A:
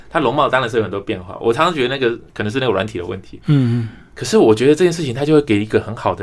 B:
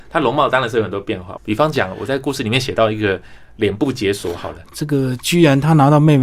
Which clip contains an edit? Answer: B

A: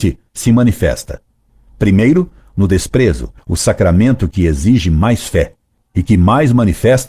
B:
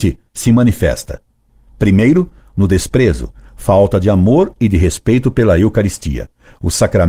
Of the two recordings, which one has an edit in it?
A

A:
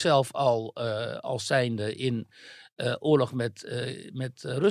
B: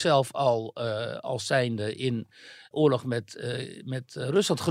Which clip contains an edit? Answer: B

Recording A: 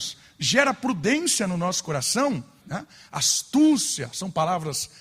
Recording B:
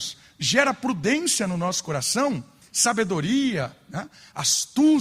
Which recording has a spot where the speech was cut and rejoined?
A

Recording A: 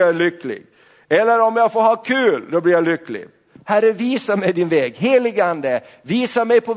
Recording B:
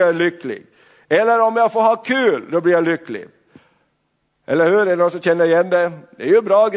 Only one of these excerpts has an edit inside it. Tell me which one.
A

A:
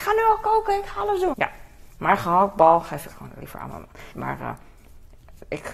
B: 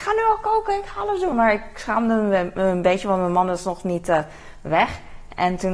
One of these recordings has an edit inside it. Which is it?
A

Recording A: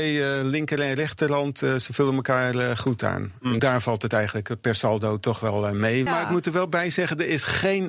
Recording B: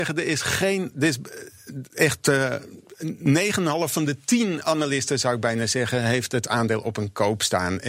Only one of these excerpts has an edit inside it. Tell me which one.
A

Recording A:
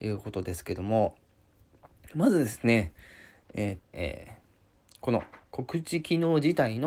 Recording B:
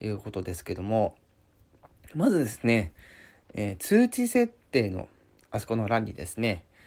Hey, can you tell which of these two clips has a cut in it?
A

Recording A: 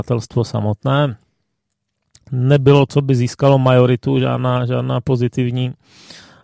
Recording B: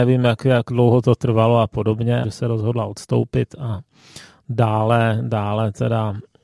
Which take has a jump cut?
B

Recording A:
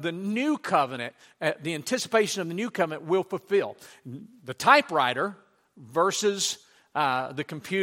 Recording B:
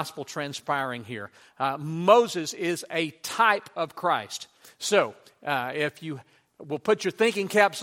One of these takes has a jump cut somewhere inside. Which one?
B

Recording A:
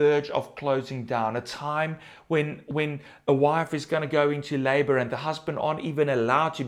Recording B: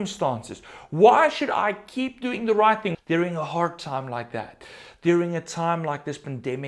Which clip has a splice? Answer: B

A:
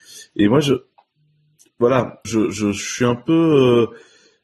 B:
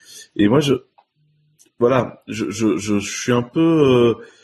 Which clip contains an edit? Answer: A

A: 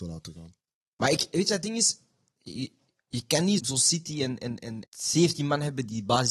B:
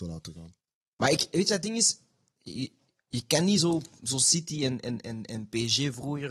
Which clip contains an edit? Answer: A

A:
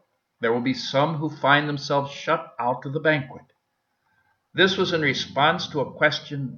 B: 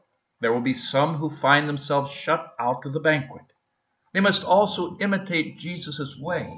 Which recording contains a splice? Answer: B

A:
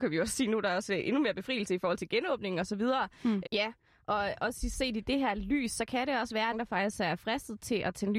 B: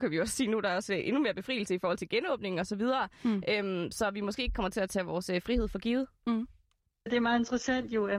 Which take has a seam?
A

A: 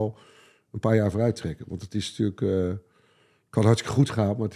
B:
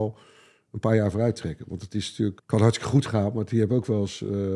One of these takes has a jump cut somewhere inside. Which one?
B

